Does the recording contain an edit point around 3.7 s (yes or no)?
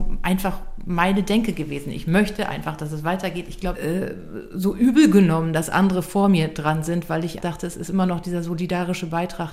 yes